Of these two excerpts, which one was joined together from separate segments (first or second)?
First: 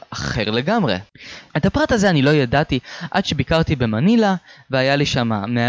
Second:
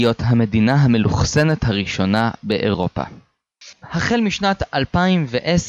first